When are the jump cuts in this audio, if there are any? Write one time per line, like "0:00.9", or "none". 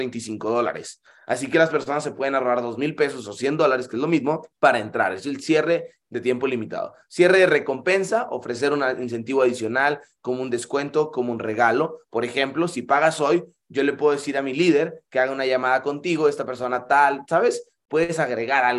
0:04.5